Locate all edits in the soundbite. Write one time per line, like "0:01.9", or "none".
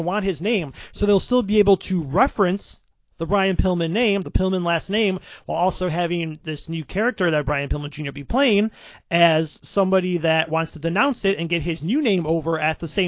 none